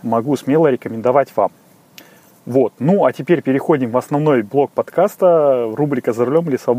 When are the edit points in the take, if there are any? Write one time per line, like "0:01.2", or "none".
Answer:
none